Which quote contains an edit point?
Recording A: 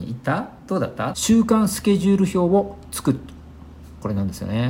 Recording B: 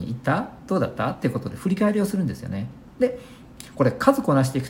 A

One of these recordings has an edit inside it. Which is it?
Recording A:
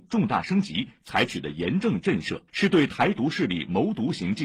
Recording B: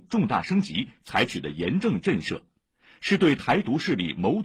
A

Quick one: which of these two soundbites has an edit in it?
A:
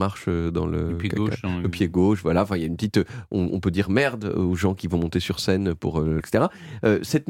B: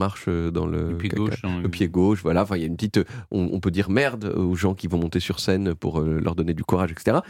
A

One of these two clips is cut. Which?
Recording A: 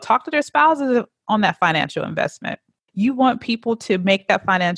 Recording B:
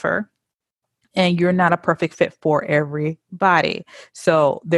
A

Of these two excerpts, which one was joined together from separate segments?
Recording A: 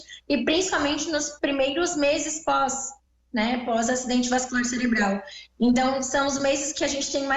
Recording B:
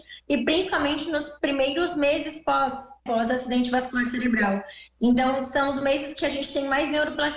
B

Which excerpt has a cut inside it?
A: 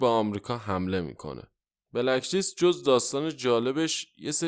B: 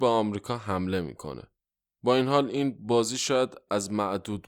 A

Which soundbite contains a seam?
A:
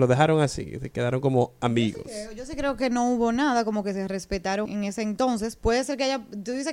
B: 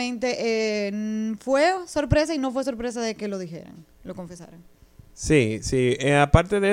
A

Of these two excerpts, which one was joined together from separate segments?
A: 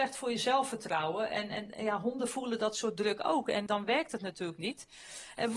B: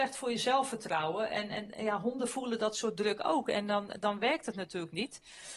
A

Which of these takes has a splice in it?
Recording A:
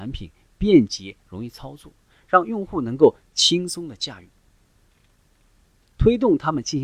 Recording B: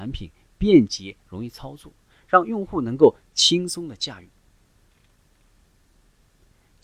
A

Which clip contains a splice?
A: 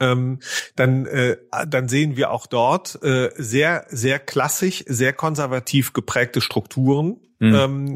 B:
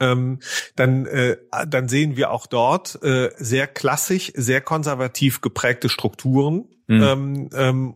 B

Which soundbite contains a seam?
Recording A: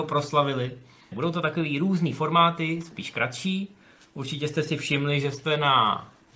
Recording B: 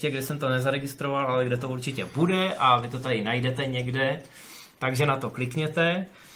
A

